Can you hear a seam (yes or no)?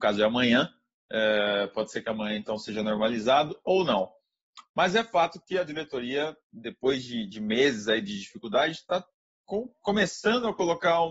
no